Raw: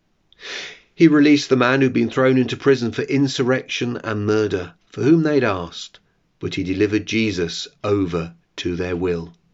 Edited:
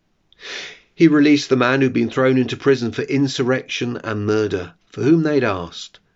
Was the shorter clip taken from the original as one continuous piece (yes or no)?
yes